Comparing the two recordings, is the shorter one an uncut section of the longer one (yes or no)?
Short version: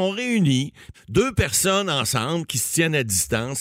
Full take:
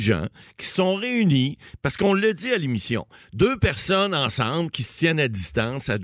no